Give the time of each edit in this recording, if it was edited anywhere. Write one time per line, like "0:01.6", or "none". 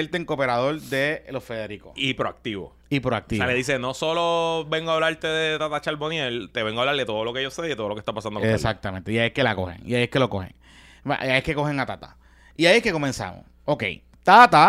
0:08.4